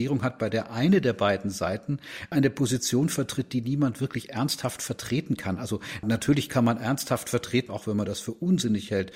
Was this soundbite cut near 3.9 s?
no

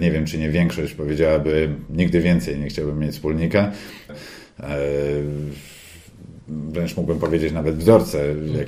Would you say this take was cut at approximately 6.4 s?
no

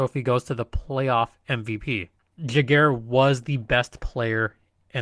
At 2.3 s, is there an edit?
yes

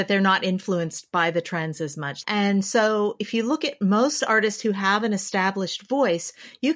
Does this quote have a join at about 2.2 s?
yes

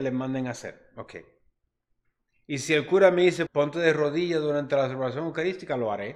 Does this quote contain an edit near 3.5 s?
yes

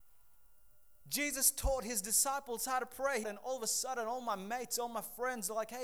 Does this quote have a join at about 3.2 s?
yes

